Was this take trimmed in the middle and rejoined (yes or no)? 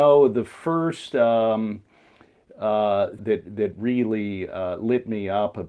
yes